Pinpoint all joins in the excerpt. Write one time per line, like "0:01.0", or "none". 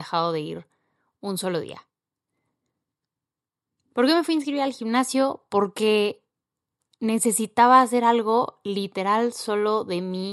none

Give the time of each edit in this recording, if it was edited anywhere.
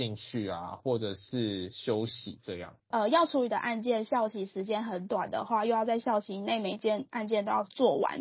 0:02.9

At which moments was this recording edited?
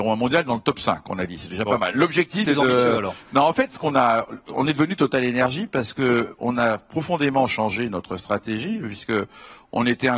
0:02.5

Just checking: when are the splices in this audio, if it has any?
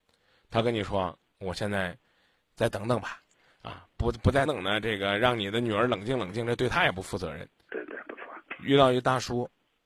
0:04.5
0:07.7

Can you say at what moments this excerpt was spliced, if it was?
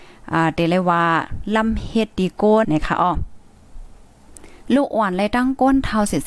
0:02.6

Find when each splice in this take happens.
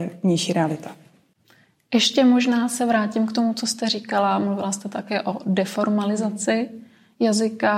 none

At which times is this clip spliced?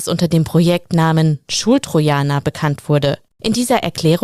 0:03.3

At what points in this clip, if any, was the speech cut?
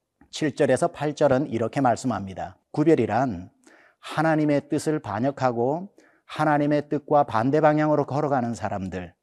0:02.6

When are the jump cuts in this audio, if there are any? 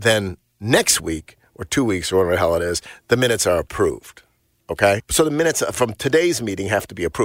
0:05.0

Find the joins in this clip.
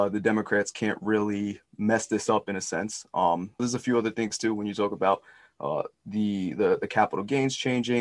0:03.6

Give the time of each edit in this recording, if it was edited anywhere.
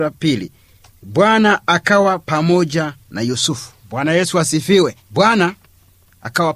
0:05.0

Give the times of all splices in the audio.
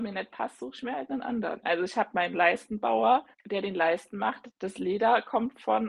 0:01.6
0:03.3
0:04.5

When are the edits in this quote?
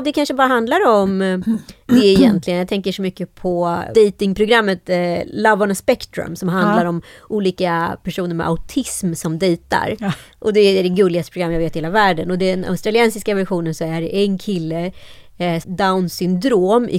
0:15.6

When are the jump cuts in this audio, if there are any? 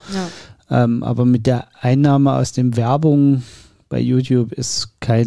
none

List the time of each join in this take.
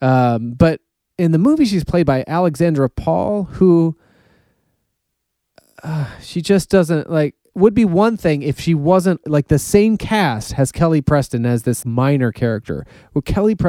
0:09.2
0:11.8

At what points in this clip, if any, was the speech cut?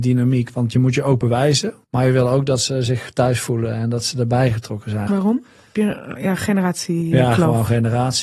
0:01.8
0:05.1

